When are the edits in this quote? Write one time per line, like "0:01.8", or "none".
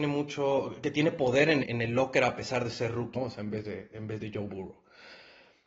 0:01.6
0:03.1